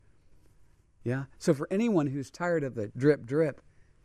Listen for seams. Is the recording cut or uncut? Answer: cut